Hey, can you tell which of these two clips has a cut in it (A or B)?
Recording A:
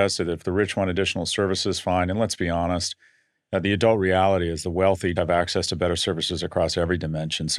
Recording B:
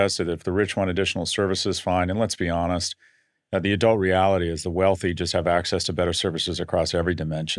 A